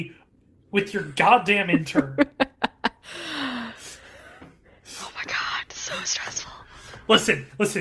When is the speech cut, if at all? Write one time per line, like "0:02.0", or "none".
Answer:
none